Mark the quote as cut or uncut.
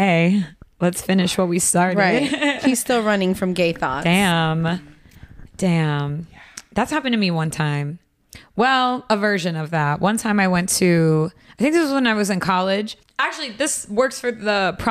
uncut